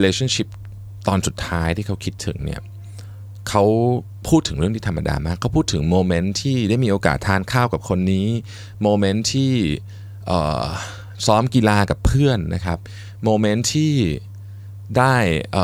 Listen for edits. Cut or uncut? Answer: uncut